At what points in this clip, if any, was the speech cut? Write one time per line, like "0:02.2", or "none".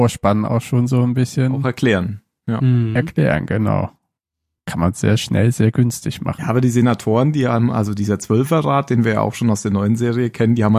none